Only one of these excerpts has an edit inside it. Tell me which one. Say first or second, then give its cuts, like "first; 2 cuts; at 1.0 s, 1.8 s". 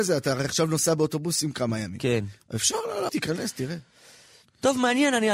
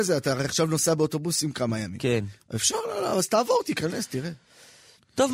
first; 1 cut; at 3.1 s